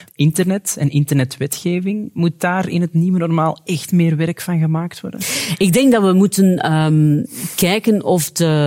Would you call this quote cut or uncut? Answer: uncut